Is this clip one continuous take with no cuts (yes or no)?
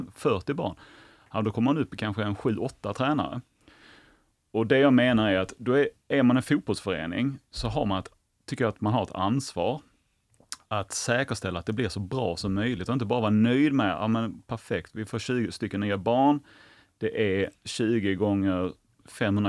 yes